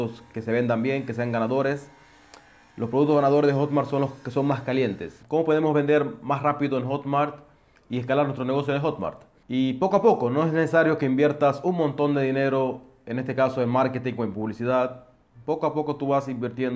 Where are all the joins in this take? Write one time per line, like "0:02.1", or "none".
0:05.2
0:09.4